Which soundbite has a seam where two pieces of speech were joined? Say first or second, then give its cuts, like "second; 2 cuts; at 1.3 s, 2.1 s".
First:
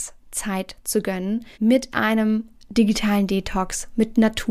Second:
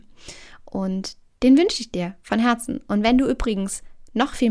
first; 1 cut; at 1.5 s